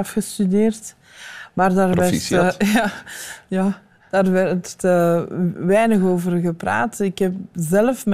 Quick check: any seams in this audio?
no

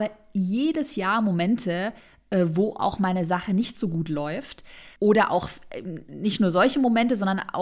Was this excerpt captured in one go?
no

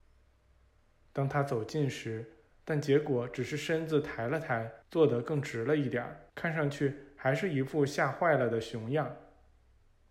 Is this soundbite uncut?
no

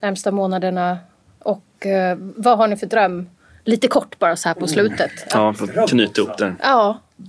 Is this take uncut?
yes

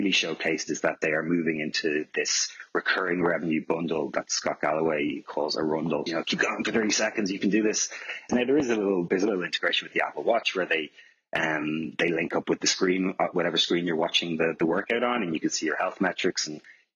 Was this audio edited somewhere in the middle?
yes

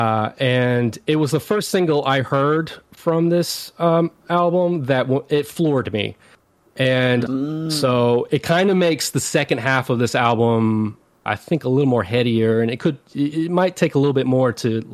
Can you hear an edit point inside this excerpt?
yes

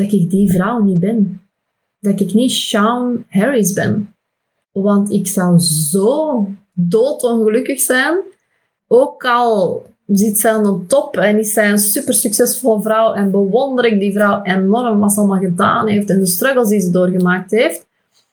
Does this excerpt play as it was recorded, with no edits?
yes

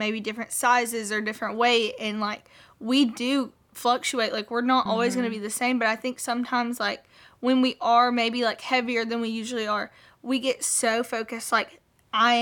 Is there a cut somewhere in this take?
no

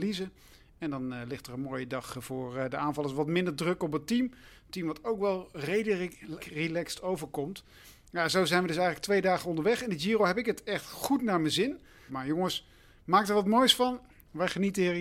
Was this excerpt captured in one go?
no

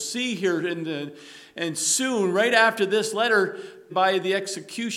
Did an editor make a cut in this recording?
yes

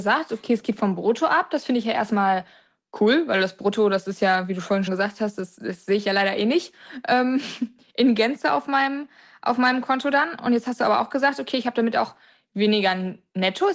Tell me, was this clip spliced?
yes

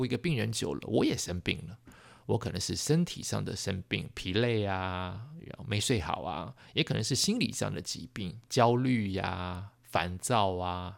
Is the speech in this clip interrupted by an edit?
no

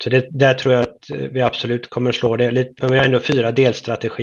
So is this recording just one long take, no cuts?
no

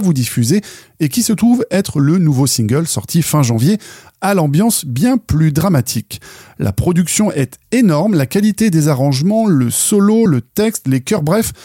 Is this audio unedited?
yes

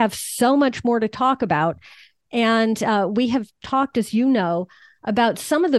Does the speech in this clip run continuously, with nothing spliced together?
yes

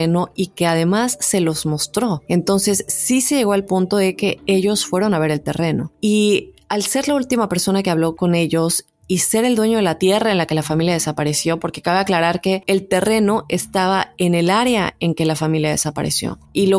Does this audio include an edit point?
no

